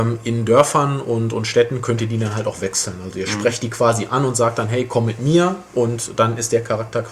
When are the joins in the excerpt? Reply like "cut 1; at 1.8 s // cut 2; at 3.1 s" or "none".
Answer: none